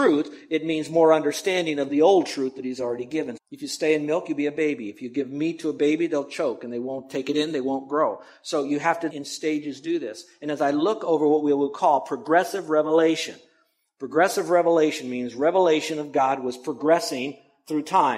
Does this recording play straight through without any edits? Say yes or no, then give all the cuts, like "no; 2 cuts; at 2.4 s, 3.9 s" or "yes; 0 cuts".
no; 2 cuts; at 3.4 s, 9.1 s